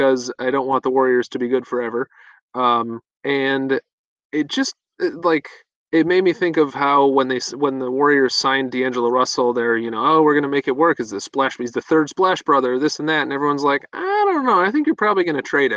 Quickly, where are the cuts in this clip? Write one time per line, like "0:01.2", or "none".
none